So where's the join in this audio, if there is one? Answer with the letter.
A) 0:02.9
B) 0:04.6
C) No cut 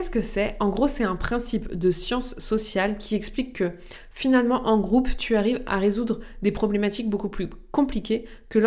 C